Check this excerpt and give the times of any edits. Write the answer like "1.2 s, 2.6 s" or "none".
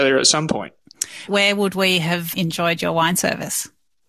1.3 s, 2.3 s

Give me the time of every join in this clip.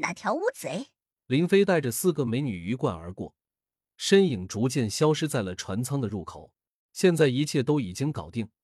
1.2 s, 6.9 s

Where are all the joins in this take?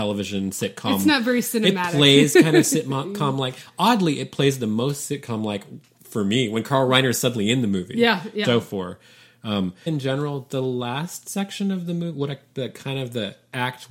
8.4 s, 9.9 s

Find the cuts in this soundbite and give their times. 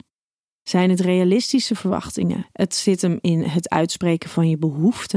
2.4 s

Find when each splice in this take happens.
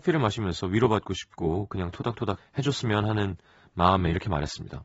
2.4 s

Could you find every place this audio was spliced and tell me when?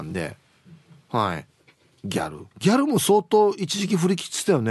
2.5 s

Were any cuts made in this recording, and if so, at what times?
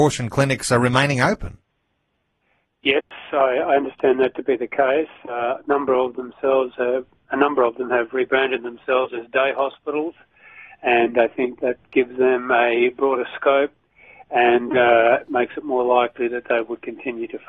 none

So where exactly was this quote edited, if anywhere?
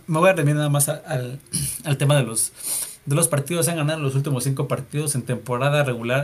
none

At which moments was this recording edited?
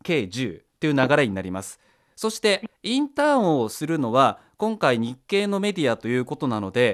none

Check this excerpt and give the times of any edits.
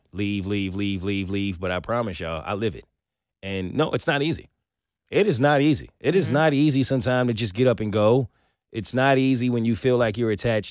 none

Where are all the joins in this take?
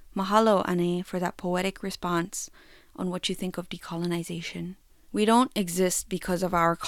5.0 s

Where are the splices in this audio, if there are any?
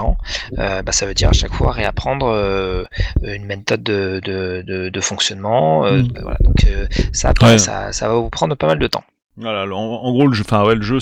6.1 s

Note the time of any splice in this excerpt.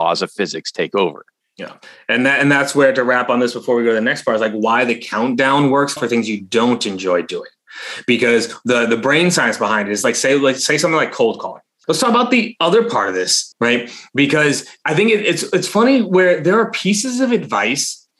6.0 s, 11.8 s, 13.5 s

